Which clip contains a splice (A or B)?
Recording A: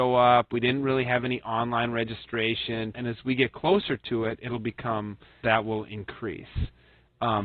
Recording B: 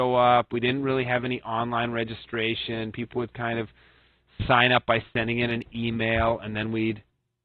A